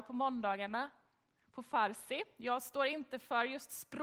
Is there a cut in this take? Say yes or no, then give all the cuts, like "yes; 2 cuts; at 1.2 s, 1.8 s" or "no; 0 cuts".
no; 0 cuts